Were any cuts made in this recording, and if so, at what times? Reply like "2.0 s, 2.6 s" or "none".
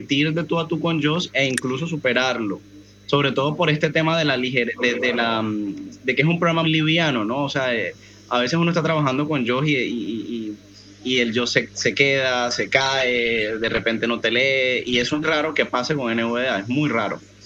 6.6 s, 15.2 s